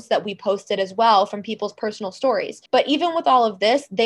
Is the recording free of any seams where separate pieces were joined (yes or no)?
no